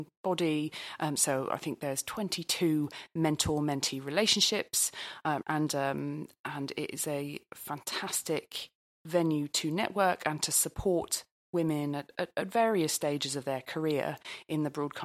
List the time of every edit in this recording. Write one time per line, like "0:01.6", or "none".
0:01.2
0:05.4